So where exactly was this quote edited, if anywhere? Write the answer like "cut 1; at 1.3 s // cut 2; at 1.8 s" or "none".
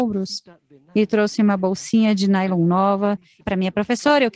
cut 1; at 3.4 s